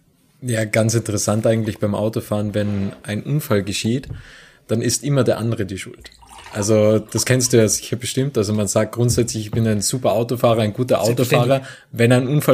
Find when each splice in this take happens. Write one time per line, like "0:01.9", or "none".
none